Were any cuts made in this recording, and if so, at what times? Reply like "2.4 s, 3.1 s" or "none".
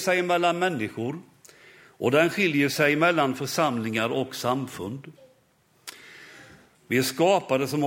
6.7 s